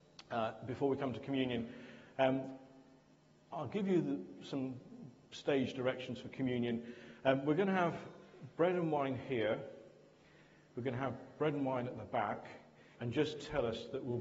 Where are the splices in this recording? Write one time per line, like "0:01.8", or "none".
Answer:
0:12.9